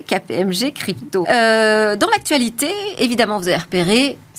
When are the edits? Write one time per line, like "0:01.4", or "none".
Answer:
0:01.2